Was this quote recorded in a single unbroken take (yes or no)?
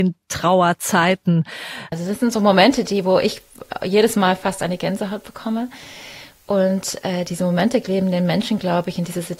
no